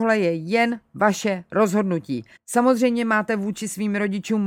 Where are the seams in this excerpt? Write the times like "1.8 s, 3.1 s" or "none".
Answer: 2.4 s